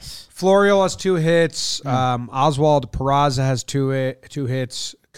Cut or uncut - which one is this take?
uncut